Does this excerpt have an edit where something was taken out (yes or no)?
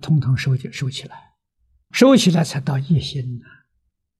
yes